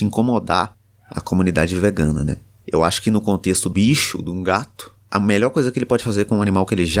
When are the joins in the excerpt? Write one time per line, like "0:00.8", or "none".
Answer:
0:02.6
0:03.7